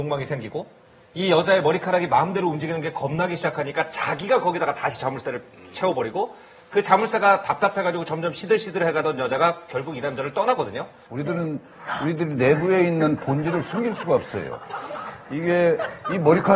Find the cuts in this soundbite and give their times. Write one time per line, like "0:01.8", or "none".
0:11.1